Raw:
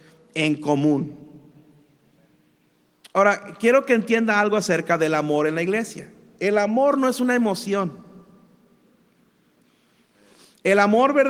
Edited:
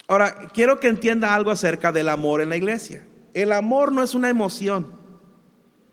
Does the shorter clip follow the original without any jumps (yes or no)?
yes